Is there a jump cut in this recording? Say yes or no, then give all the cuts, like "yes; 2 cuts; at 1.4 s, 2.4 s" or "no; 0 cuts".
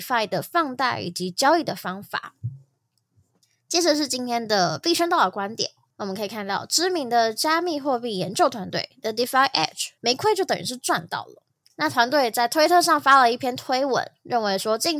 yes; 1 cut; at 10.0 s